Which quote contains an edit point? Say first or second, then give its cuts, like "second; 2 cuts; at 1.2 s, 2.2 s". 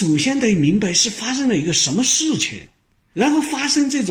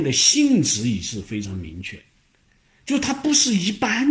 first; 1 cut; at 3.1 s